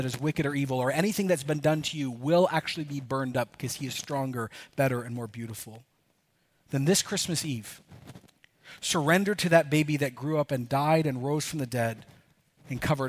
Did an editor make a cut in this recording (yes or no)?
no